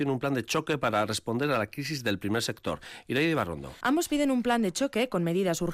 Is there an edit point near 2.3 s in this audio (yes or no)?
no